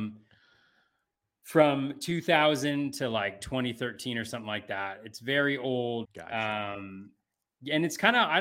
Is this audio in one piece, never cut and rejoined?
no; 1 cut; at 6.0 s

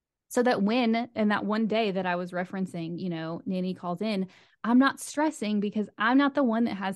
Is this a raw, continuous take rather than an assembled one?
yes; 0 cuts

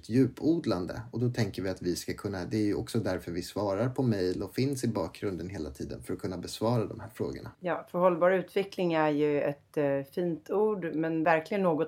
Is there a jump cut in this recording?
yes; 1 cut; at 7.5 s

